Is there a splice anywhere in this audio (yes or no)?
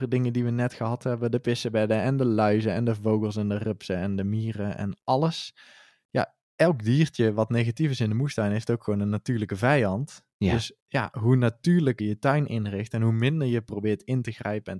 yes